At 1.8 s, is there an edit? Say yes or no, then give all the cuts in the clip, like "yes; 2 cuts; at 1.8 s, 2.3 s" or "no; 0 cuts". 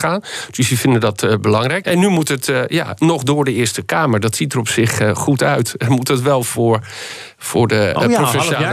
yes; 1 cut; at 1.8 s